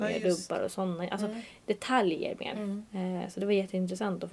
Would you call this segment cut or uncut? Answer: uncut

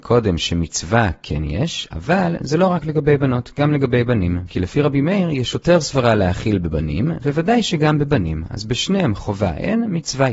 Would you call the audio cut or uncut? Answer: cut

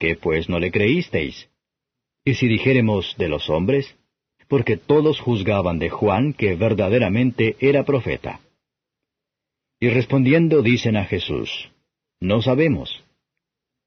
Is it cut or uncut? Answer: cut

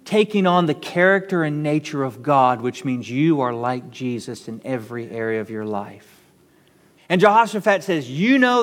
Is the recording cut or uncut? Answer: cut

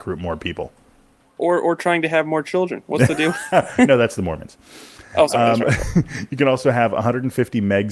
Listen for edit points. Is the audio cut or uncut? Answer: uncut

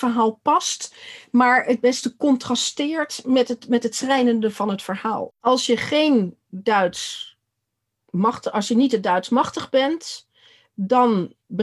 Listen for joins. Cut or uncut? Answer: cut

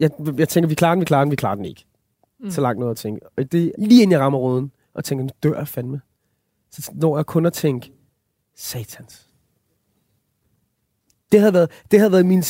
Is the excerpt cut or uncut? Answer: cut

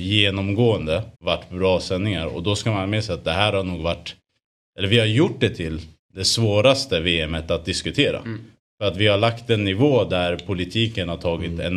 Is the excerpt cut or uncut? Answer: cut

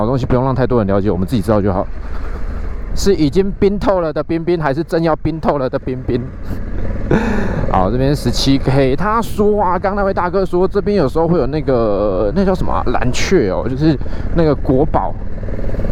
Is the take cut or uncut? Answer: cut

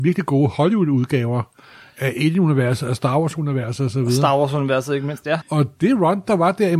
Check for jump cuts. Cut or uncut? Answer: cut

